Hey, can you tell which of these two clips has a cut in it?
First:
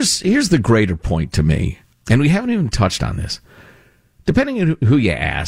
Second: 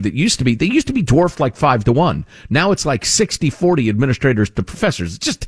first; 1 cut; at 1.9 s

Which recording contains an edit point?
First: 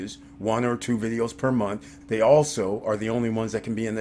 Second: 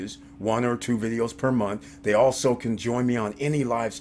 first; 1 cut; at 2.0 s

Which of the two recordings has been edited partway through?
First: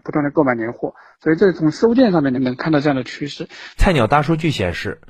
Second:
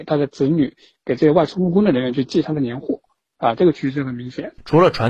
first; 2 cuts; at 2.4 s, 3.8 s

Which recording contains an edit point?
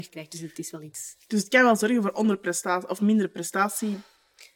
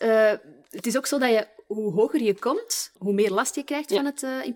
second; 1 cut; at 3.0 s

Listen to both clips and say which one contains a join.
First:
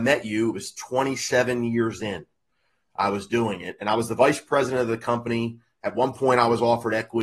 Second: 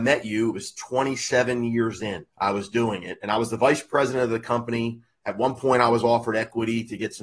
second; 1 cut; at 2.3 s

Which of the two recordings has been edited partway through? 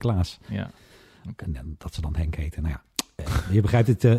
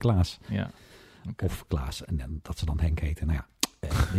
first; 1 cut; at 1.4 s

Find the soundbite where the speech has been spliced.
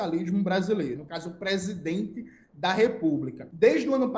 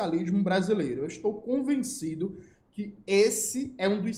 first; 1 cut; at 1.0 s

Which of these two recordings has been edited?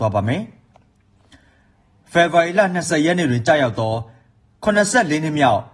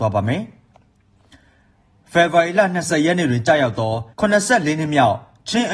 second; 1 cut; at 4.1 s

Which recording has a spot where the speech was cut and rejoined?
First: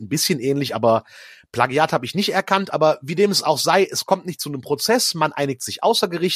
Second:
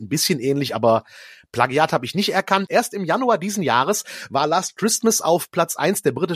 second; 1 cut; at 2.7 s

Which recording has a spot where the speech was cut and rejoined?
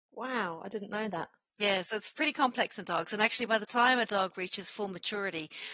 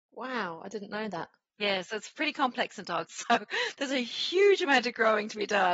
second; 1 cut; at 3.1 s

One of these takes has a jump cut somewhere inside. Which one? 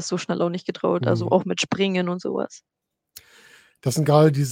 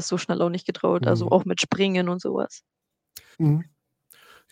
second; 1 cut; at 3.3 s

